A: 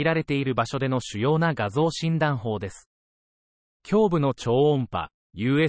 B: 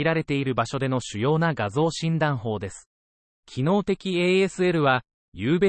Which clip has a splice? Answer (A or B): B